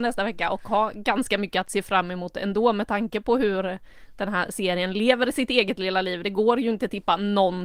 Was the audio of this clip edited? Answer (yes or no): no